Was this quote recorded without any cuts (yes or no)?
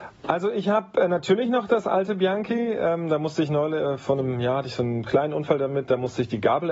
yes